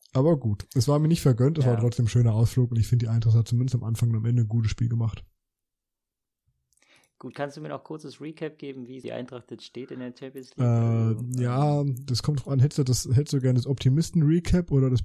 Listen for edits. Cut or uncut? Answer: cut